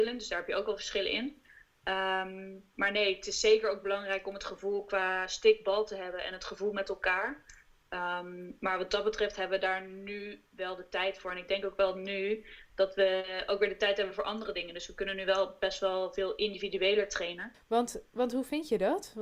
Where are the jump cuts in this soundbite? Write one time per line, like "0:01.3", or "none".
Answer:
0:10.5
0:17.5

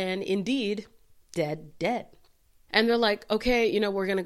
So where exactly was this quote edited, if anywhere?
0:01.7

